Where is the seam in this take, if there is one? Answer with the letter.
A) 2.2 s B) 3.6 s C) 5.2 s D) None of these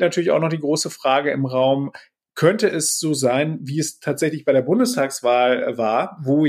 D